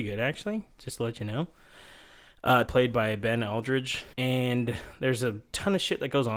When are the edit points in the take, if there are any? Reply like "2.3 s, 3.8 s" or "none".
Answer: 2.7 s, 4.1 s